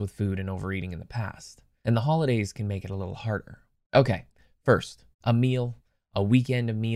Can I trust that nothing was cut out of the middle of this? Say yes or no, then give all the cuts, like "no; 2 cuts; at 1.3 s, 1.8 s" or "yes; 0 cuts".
no; 2 cuts; at 3.8 s, 5.1 s